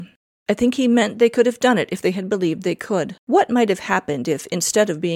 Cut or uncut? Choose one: cut